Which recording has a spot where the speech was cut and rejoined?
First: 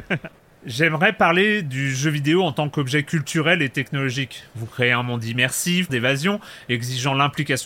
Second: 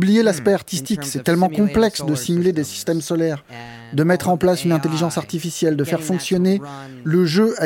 first; 1 cut; at 5.9 s

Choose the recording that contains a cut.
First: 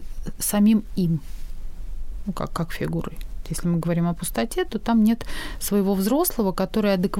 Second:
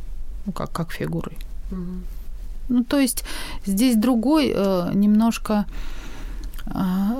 first; 1 cut; at 3.4 s

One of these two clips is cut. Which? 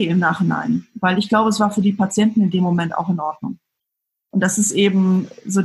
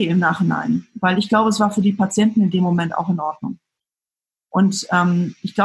first; 1 cut; at 4.2 s

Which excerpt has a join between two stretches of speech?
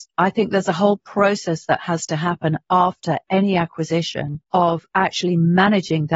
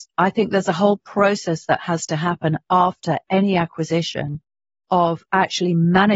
first; 1 cut; at 4.4 s

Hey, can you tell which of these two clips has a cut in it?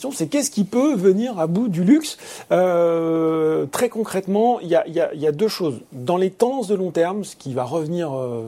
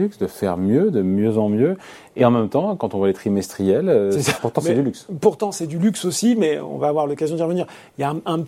second; 1 cut; at 4.4 s

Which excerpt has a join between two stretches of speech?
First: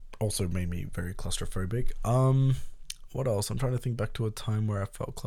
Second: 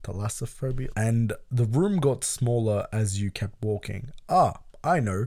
second; 1 cut; at 0.9 s

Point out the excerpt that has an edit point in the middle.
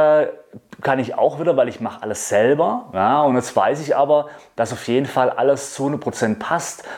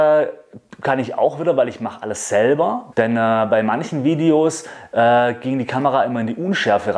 second; 1 cut; at 2.9 s

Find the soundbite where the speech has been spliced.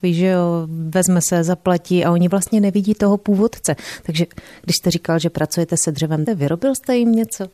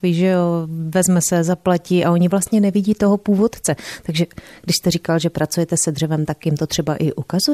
first; 1 cut; at 6.3 s

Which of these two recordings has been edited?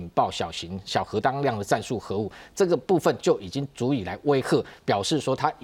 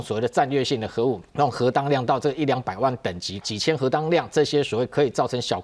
second; 2 cuts; at 1.3 s, 3.4 s

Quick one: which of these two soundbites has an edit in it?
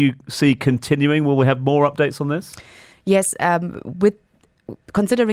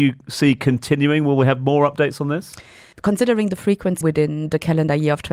second; 2 cuts; at 2.9 s, 4.0 s

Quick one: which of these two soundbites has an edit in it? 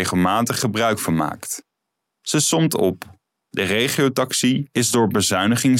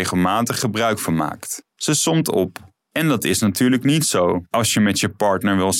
second; 2 cuts; at 1.7 s, 2.8 s

